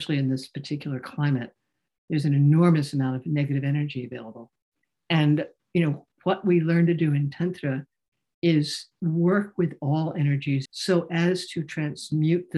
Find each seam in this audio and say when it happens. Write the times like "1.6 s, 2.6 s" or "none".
10.7 s

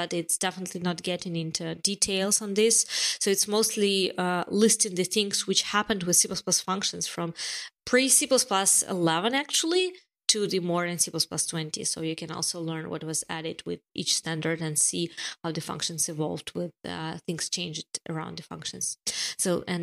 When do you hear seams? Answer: none

